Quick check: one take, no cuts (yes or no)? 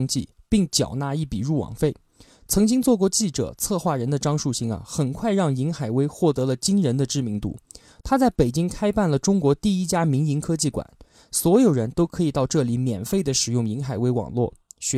yes